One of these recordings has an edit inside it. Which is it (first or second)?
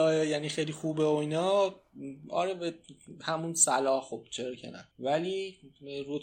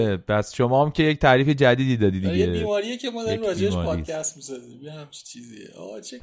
first